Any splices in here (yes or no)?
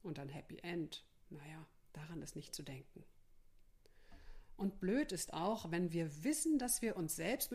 no